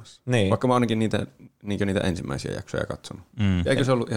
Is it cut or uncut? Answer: uncut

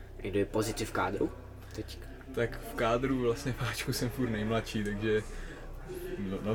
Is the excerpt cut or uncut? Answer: uncut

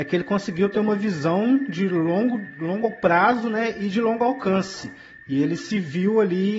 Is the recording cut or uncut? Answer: uncut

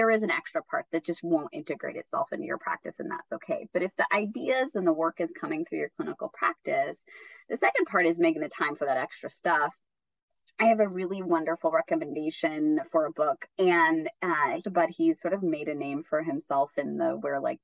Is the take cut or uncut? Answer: cut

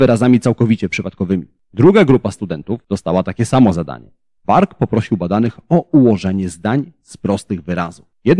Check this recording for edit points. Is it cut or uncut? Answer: cut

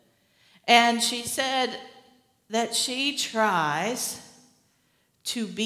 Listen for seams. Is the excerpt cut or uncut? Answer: uncut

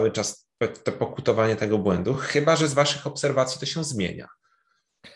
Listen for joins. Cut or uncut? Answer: uncut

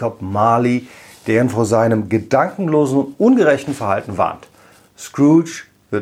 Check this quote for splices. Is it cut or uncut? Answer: uncut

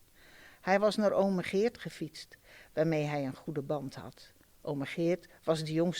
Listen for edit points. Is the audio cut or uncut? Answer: uncut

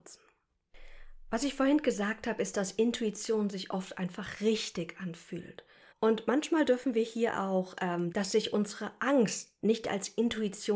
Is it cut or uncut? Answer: cut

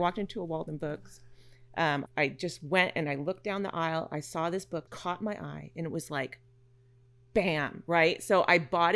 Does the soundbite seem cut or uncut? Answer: cut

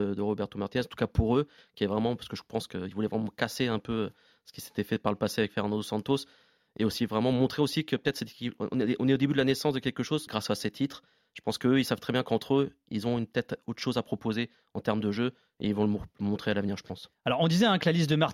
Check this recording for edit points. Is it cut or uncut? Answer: cut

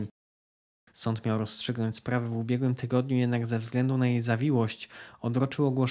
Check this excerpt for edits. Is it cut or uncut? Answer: cut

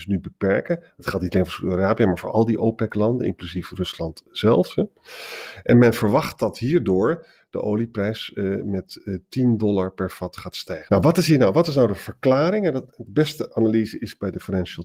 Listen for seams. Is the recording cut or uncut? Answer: cut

